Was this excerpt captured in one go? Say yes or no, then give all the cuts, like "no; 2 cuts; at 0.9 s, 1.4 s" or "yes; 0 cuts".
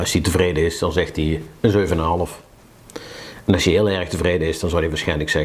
yes; 0 cuts